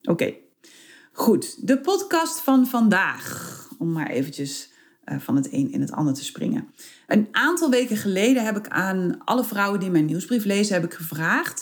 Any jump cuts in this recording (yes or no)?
no